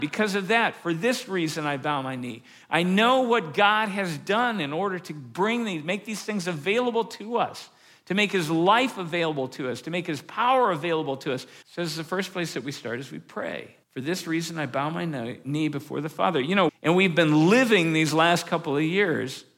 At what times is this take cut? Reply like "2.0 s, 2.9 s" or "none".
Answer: 11.6 s, 13.8 s, 16.7 s